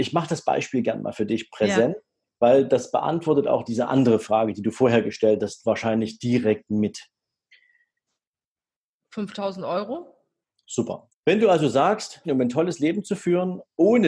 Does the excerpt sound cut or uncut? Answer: cut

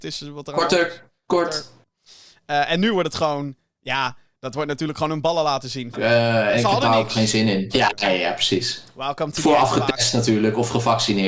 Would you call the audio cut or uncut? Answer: cut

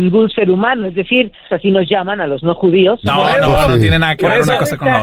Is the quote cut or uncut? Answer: cut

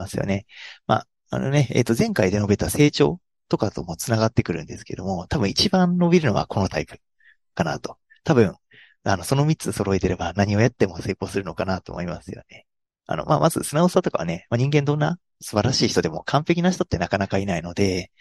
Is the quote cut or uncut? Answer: uncut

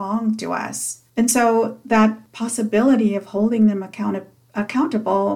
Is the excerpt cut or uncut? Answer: uncut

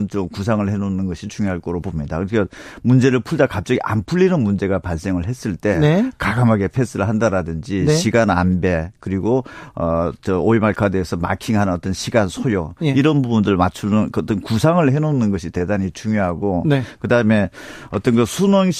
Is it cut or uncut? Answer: uncut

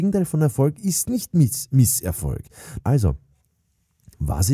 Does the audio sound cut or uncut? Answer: cut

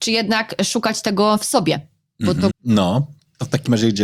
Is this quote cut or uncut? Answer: cut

